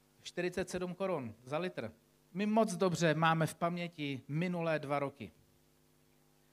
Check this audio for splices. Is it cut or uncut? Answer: cut